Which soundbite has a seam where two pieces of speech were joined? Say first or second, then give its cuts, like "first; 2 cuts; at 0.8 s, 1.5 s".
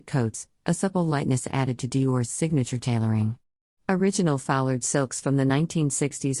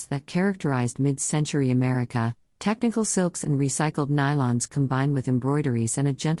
first; 1 cut; at 3.7 s